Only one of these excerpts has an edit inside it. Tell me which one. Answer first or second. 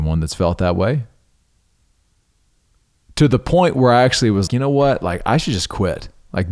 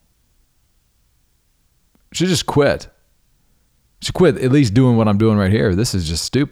first